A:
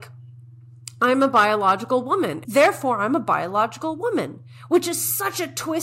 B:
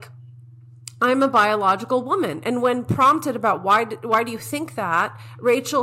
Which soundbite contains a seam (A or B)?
A